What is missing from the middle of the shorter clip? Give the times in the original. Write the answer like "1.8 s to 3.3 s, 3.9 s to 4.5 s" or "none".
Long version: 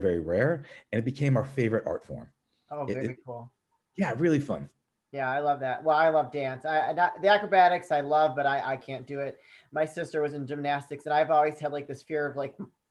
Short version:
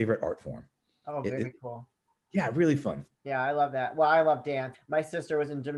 4.8 s to 5.0 s, 6.6 s to 9.6 s